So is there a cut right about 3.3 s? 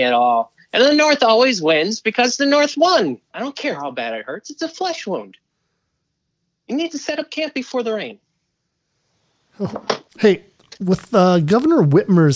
yes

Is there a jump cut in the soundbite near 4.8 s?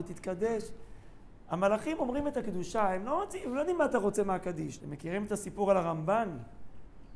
yes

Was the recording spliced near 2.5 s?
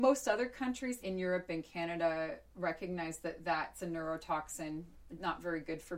no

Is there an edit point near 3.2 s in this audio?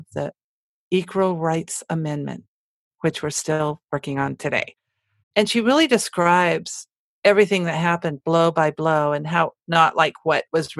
no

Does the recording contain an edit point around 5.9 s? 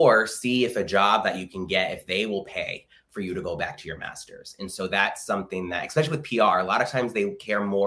no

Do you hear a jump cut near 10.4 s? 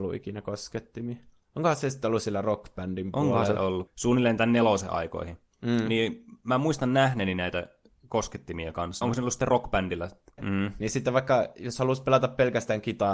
yes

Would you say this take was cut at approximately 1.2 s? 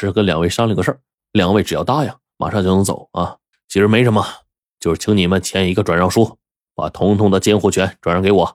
no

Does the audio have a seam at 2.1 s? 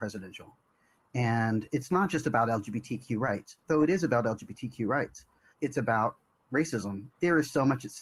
no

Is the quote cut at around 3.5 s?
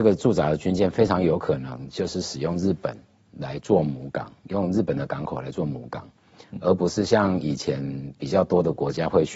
no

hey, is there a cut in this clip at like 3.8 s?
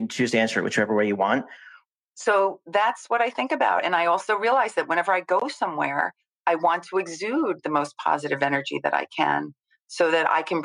no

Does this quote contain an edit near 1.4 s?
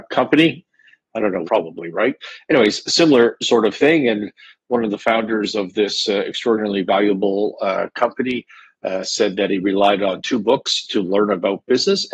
yes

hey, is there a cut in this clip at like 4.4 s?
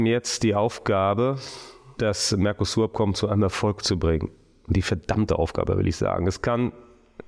no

